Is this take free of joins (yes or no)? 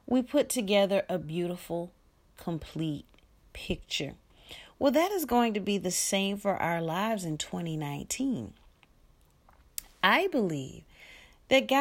yes